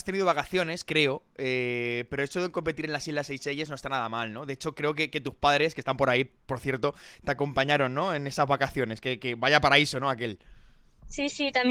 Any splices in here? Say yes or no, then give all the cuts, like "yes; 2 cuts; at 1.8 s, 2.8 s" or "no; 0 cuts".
no; 0 cuts